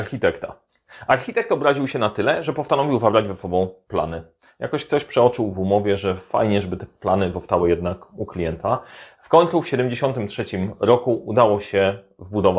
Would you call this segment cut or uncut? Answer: uncut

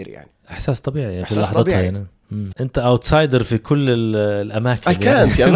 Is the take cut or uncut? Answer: cut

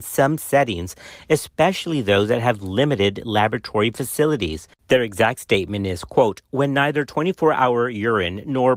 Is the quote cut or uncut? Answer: uncut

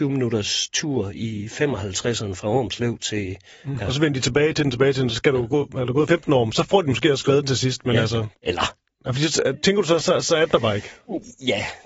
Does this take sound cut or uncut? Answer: cut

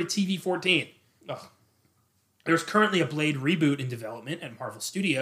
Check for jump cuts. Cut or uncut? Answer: cut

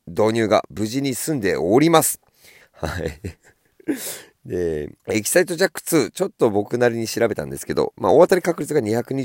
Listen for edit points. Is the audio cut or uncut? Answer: cut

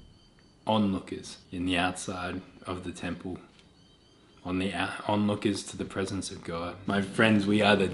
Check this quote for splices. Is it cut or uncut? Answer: cut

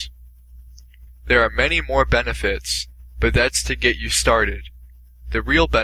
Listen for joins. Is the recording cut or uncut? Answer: cut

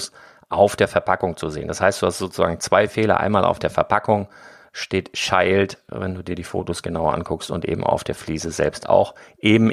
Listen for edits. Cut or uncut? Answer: uncut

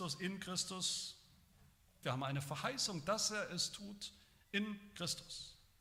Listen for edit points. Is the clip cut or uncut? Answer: cut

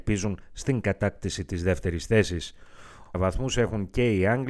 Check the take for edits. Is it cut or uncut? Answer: cut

